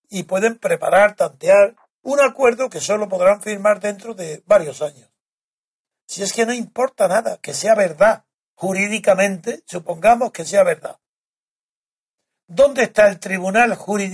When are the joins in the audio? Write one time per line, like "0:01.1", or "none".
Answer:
0:05.9